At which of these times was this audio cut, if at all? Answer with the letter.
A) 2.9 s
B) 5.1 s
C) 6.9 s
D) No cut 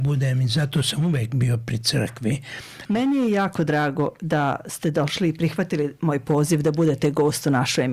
A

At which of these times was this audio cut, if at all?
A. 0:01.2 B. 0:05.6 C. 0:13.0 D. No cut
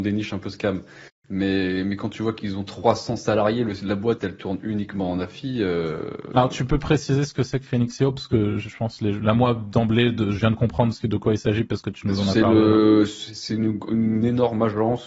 D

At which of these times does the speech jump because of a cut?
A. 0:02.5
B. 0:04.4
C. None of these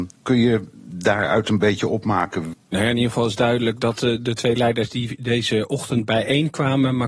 A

